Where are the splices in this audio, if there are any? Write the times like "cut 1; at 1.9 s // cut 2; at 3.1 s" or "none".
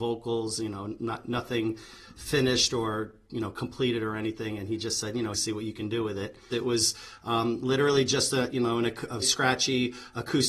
cut 1; at 5.3 s // cut 2; at 6.5 s // cut 3; at 9.2 s

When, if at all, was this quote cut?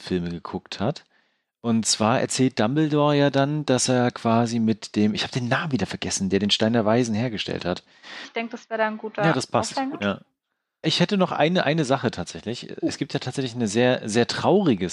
cut 1; at 8.2 s

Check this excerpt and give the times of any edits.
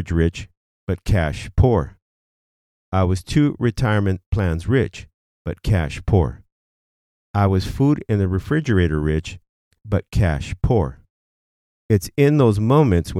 none

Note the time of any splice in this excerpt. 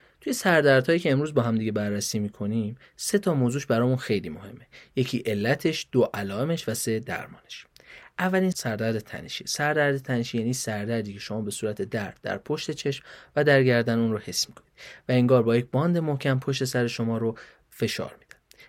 cut 1; at 8.5 s

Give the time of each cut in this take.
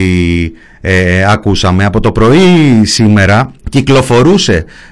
cut 1; at 3.6 s

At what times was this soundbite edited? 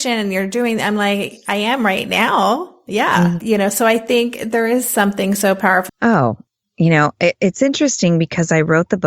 cut 1; at 3.4 s // cut 2; at 5.9 s

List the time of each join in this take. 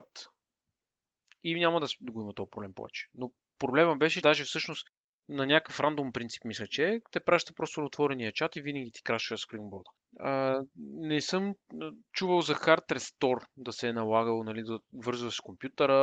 cut 1; at 4.2 s

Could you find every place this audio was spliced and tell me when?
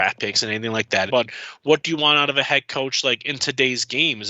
cut 1; at 1.1 s

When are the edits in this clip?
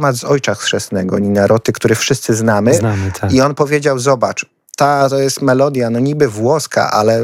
none

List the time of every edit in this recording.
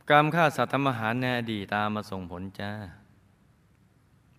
cut 1; at 1.7 s

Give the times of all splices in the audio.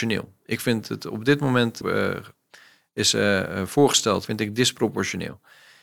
cut 1; at 1.8 s // cut 2; at 4.3 s

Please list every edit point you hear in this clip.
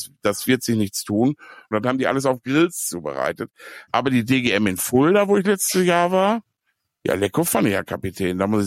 cut 1; at 1.7 s // cut 2; at 3.9 s

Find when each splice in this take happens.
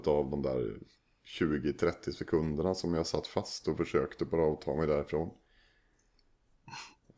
none

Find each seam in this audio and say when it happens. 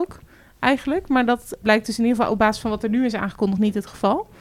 cut 1; at 1.6 s

